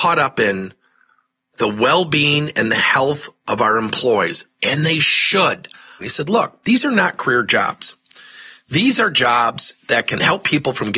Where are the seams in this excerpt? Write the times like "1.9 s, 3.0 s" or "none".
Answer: 6.0 s